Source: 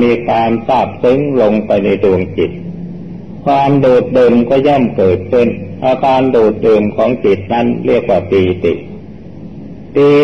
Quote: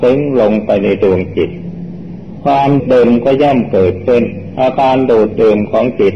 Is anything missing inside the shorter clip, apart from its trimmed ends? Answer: yes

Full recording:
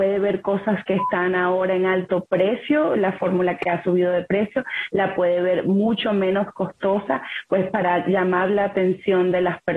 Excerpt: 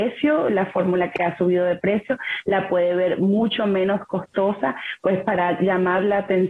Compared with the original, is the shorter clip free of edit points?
yes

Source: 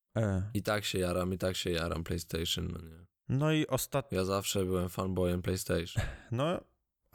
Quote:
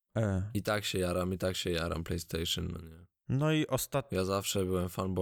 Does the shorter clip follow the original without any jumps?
yes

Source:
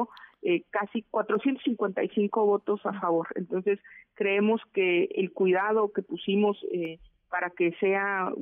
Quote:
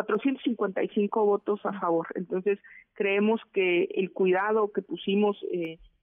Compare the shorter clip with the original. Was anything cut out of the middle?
no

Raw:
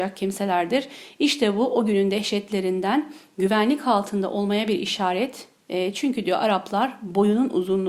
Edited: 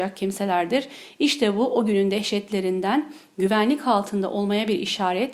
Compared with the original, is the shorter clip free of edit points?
yes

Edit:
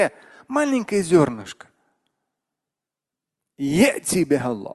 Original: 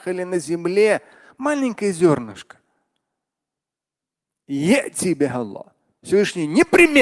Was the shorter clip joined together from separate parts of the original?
no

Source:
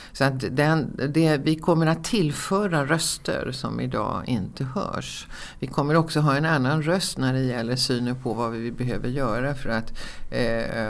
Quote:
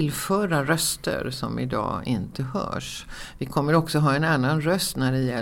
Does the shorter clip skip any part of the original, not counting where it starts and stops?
no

